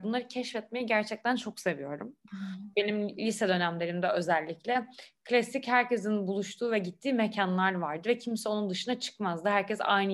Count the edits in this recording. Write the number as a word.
one